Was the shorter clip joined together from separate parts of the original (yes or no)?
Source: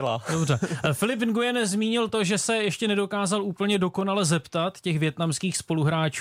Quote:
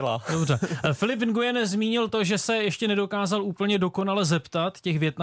no